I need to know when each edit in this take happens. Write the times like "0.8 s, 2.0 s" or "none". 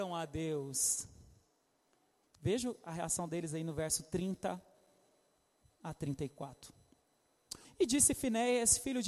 2.2 s, 7.6 s